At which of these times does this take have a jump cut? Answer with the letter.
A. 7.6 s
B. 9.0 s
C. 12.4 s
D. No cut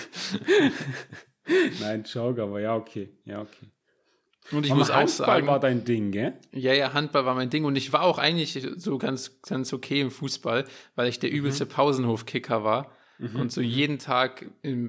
D